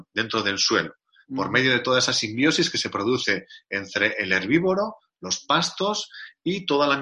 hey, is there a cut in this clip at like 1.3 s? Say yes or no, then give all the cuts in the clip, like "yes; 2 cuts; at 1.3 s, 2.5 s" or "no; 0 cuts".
no; 0 cuts